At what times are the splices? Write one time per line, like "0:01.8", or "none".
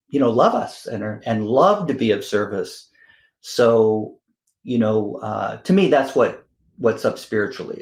none